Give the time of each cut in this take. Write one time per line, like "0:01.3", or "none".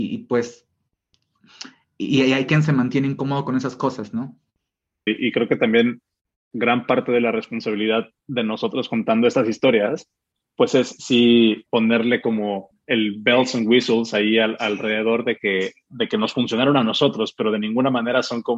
0:05.1